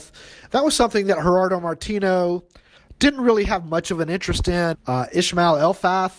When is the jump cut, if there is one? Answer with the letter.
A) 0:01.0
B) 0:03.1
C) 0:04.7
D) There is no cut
C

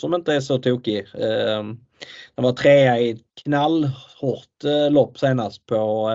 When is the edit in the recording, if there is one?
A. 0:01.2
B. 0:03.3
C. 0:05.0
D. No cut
B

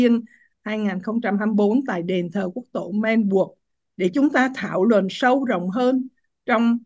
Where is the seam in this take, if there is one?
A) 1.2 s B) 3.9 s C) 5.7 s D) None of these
D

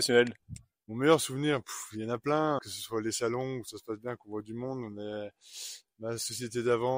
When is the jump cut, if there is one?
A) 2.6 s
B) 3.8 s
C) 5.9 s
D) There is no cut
D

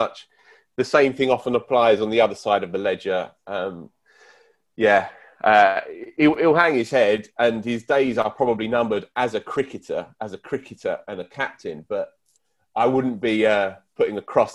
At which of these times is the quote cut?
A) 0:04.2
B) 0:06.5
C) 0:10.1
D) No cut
D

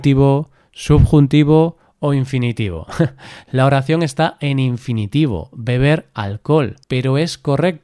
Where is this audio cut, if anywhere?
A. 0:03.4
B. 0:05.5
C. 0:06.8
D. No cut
C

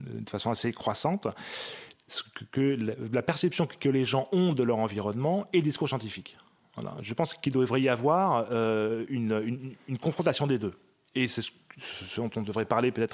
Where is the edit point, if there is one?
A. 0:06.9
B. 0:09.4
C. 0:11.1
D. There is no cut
D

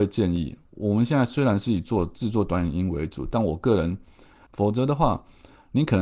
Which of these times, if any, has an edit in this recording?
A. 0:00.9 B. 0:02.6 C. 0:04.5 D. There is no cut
C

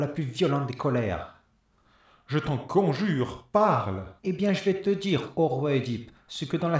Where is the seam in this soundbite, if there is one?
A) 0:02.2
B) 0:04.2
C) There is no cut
B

